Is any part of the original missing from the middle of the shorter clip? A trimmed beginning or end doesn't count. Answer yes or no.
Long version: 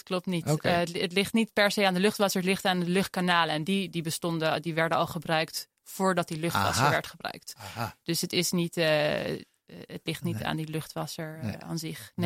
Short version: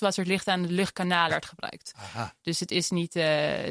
yes